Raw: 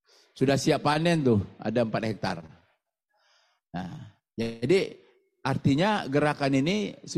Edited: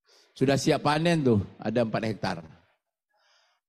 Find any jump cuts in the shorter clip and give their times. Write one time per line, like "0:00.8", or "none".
none